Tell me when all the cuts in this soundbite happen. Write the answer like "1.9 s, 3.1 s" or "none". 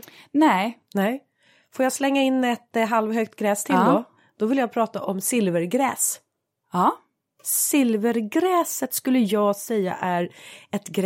none